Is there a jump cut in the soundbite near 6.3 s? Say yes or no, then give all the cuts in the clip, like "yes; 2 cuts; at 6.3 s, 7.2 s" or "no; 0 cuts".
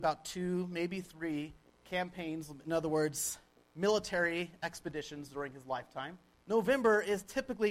yes; 1 cut; at 6.3 s